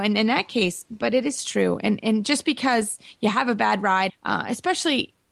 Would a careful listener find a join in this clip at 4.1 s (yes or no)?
yes